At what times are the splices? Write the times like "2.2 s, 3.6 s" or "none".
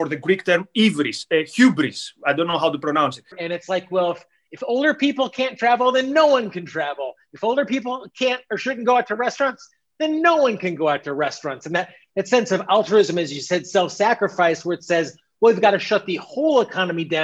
3.3 s